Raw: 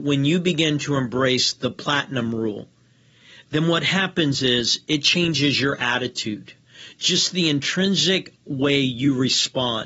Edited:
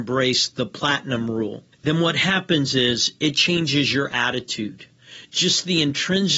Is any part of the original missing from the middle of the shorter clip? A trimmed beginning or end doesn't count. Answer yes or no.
yes